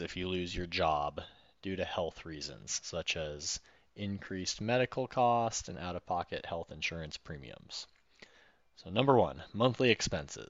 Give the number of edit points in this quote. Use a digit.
0